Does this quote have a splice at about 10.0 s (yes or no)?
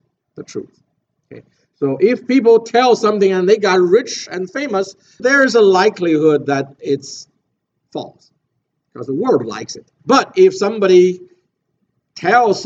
yes